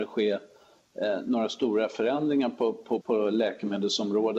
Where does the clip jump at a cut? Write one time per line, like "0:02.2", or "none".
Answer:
0:03.0